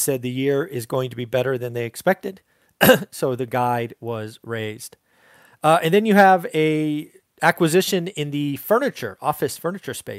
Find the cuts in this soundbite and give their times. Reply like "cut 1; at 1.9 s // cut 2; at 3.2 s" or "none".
none